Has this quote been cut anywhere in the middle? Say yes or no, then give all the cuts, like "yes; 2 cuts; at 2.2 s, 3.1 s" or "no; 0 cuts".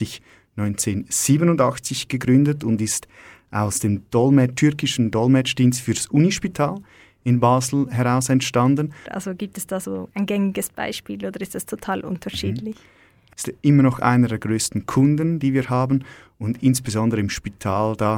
yes; 2 cuts; at 9.1 s, 13.3 s